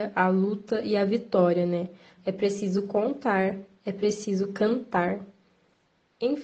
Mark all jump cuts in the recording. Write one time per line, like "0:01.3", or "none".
0:02.2